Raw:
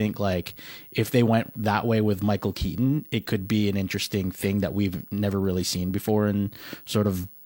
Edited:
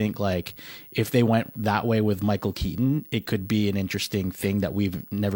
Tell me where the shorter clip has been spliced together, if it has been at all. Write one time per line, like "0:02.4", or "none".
none